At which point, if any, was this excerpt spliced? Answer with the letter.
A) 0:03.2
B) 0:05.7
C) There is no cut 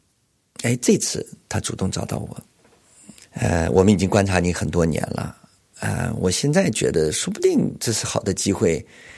A